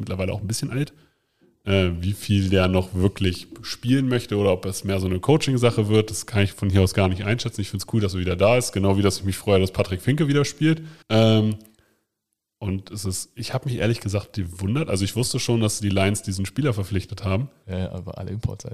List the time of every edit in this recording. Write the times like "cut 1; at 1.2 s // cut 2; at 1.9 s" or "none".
cut 1; at 11.0 s // cut 2; at 17.6 s